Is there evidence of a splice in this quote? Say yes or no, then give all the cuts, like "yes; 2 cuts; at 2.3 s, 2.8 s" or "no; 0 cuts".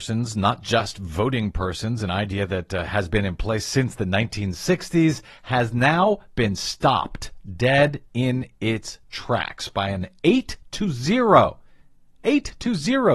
no; 0 cuts